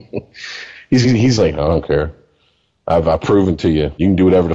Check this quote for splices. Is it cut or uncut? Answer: cut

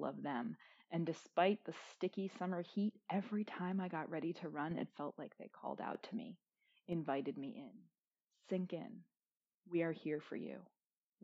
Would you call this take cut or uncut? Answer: uncut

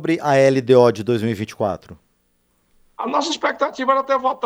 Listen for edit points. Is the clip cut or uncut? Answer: uncut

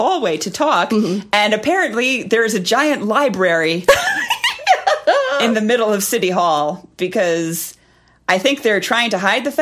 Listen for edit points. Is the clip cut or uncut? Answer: uncut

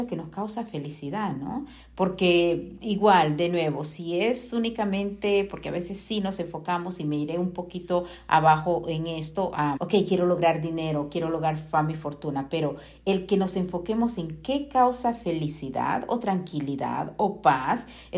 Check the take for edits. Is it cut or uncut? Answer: cut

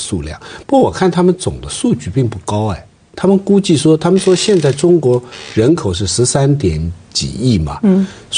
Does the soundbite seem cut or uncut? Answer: uncut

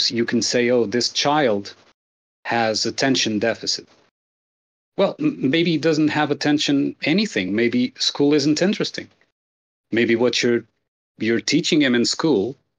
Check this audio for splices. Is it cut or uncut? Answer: uncut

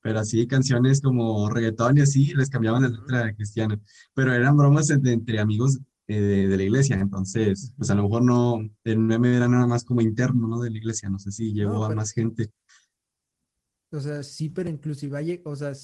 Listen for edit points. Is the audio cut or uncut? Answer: uncut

